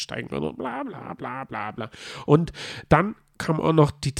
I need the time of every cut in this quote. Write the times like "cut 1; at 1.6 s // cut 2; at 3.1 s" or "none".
none